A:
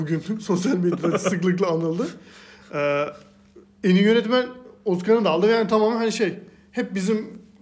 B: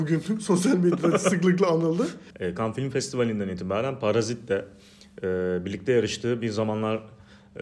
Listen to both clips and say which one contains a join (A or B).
B